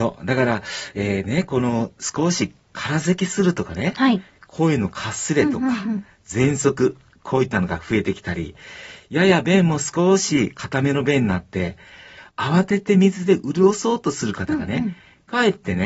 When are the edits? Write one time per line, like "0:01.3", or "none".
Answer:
none